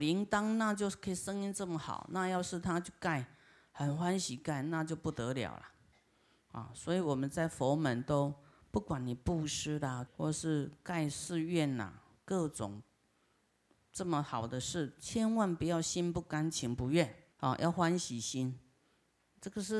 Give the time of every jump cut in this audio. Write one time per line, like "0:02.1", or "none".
0:10.1
0:17.3